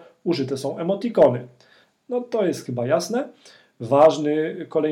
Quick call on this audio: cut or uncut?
uncut